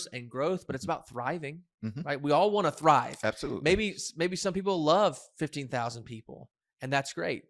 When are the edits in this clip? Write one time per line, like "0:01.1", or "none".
none